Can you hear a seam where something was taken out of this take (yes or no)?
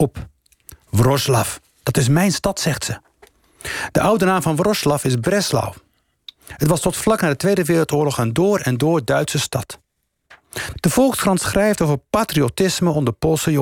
yes